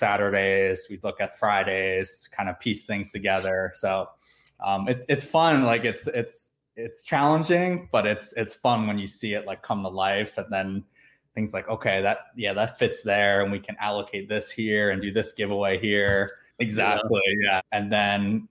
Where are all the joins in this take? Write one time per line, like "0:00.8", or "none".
0:16.5
0:17.6